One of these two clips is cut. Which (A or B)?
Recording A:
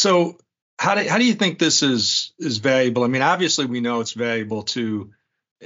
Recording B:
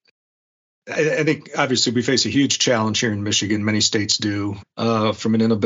B